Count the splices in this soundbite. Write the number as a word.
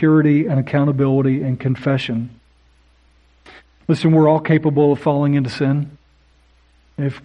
one